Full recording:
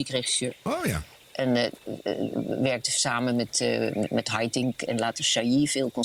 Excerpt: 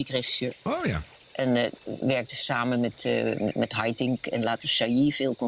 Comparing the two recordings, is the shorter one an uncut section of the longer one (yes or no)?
no